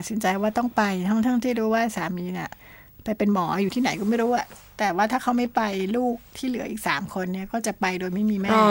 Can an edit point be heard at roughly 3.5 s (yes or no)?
no